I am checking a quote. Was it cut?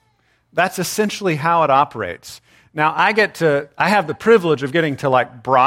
no; 0 cuts

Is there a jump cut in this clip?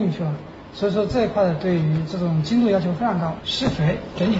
yes; 1 cut; at 3.4 s

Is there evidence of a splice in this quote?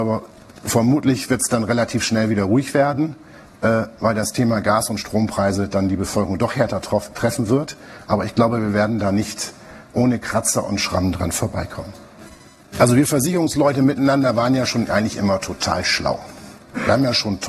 yes; 1 cut; at 12.7 s

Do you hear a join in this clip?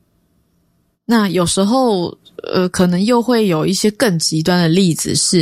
no; 0 cuts

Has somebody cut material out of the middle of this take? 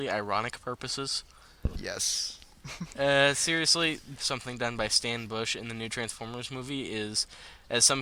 yes; 2 cuts; at 2.9 s, 4.2 s

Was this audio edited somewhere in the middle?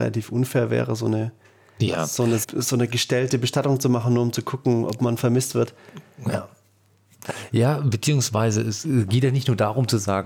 yes; 1 cut; at 2.4 s

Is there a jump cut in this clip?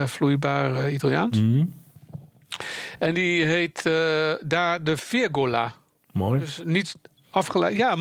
no; 0 cuts

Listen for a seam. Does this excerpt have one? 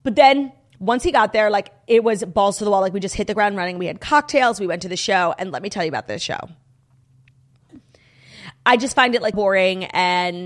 yes; 2 cuts; at 7.7 s, 9.3 s

